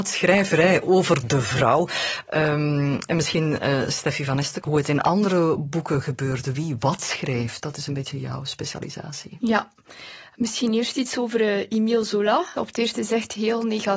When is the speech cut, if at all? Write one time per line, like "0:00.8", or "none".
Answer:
0:04.6
0:12.6